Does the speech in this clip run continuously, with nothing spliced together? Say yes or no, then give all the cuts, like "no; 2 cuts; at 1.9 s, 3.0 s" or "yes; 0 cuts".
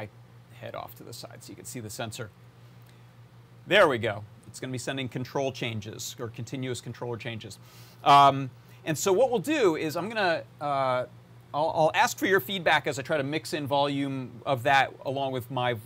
no; 1 cut; at 4.5 s